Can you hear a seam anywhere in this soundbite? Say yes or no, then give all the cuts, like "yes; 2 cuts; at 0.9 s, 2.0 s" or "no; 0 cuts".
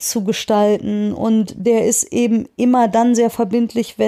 no; 0 cuts